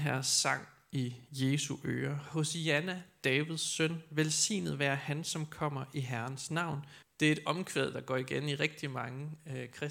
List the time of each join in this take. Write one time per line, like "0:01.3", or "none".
0:07.0